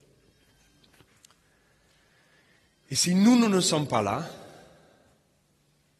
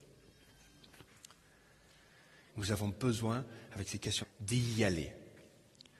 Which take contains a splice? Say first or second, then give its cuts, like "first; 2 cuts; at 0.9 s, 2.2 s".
second; 2 cuts; at 2.5 s, 4.2 s